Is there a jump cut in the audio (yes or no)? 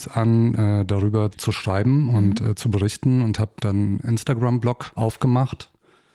no